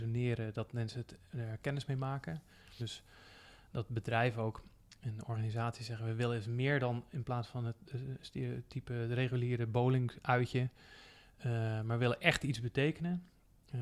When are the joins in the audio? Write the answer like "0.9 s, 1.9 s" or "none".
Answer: 2.8 s